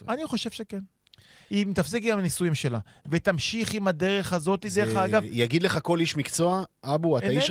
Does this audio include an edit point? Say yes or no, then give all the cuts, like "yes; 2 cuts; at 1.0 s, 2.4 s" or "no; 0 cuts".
no; 0 cuts